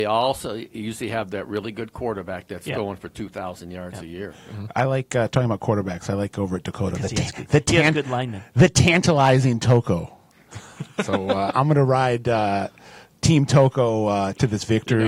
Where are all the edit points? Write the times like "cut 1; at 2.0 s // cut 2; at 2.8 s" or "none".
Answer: none